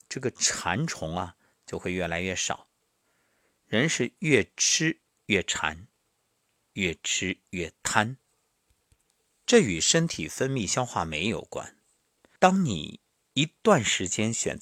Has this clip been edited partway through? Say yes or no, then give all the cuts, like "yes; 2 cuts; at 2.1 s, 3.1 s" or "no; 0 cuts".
yes; 1 cut; at 12.4 s